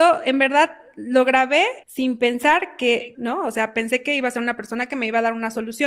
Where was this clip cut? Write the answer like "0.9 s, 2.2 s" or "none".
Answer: 1.8 s, 3.1 s